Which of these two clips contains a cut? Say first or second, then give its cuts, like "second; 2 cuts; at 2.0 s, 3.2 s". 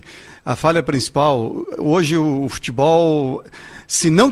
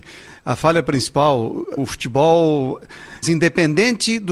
second; 2 cuts; at 1.8 s, 3.2 s